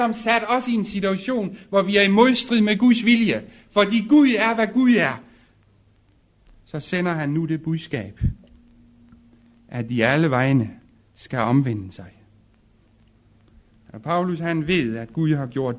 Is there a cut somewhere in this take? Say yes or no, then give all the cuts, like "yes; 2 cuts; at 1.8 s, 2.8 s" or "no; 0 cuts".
no; 0 cuts